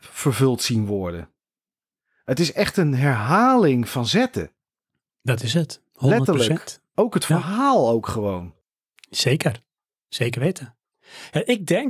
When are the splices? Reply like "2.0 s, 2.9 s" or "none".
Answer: none